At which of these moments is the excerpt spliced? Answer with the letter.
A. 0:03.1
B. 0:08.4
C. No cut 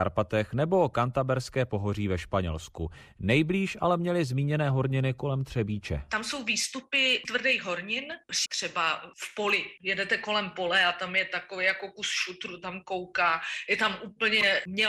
B